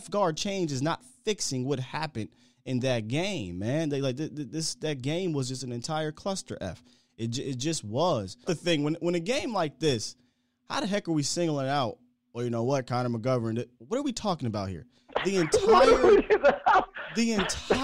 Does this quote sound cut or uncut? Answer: cut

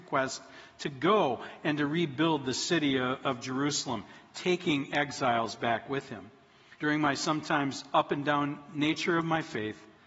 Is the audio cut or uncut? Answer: cut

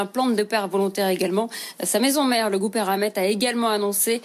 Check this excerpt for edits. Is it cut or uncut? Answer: uncut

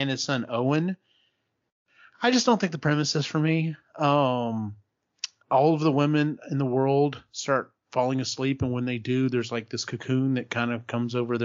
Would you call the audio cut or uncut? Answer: cut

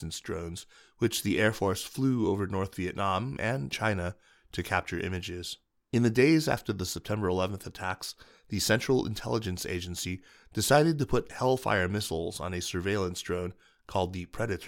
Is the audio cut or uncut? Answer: cut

